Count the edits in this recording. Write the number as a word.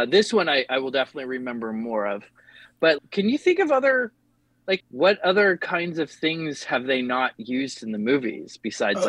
two